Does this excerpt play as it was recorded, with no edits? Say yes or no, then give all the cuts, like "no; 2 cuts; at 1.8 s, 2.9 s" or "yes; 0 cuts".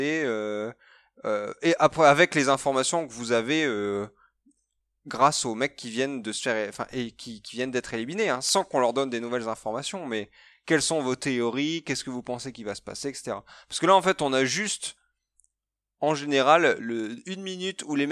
yes; 0 cuts